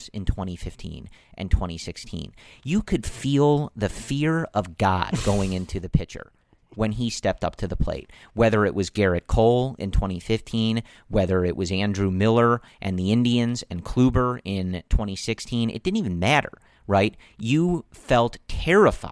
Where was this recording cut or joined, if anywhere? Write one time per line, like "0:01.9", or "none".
none